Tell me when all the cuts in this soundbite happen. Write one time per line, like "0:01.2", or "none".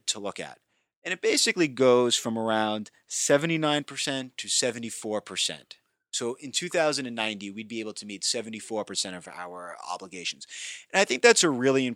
0:00.9